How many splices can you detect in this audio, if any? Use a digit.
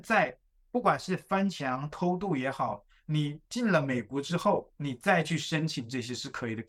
2